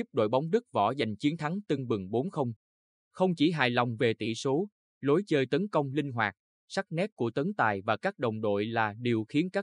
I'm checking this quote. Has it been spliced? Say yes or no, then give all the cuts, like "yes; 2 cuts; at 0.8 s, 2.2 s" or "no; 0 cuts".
no; 0 cuts